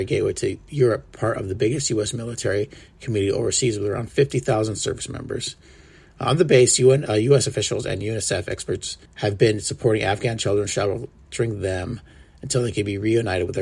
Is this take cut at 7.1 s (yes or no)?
yes